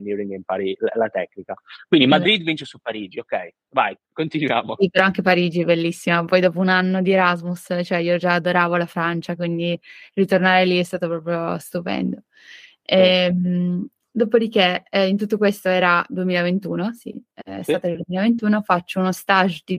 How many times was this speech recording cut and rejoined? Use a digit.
0